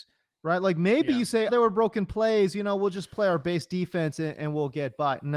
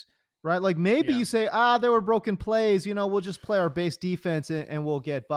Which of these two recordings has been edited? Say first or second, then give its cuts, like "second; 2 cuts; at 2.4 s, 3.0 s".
first; 1 cut; at 1.5 s